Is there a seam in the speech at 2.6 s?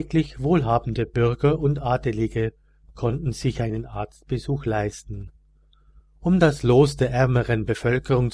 no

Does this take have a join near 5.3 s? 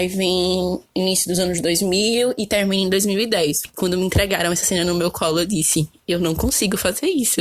no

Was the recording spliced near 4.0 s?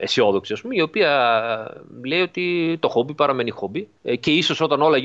yes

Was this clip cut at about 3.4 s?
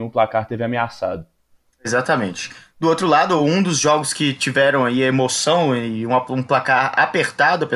no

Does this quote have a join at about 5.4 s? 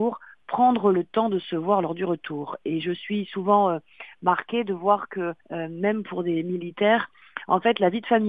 yes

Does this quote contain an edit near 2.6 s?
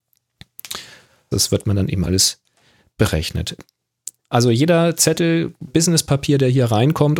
no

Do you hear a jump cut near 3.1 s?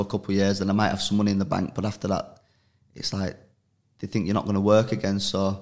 no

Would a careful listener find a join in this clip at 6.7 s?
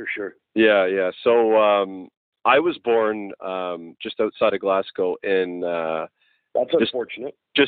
no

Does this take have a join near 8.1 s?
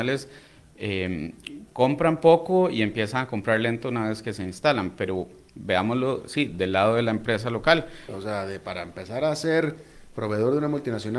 yes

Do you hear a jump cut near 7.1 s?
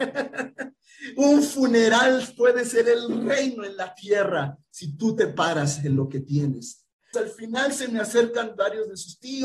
yes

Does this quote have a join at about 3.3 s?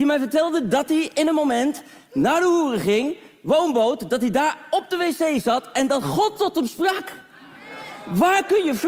no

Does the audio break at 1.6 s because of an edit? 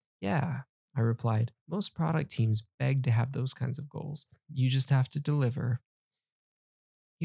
yes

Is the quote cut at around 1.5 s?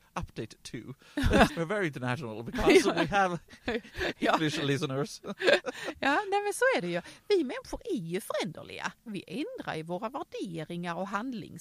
yes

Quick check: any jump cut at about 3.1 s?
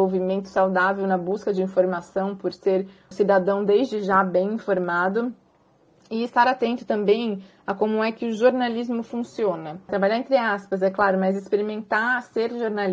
yes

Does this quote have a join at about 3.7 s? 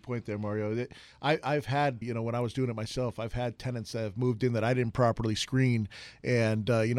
no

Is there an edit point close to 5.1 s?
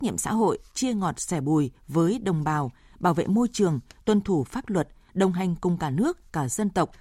yes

